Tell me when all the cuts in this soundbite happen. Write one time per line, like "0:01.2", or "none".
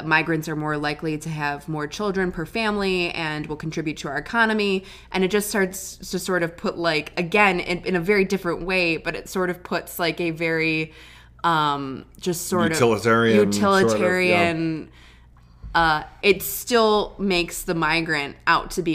0:16.2